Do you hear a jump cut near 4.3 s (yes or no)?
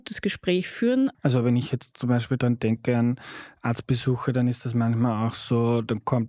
no